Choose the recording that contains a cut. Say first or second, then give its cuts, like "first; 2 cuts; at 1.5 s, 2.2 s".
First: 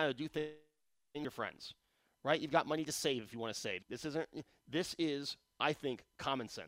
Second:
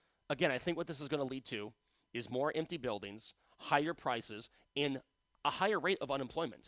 first; 1 cut; at 3.8 s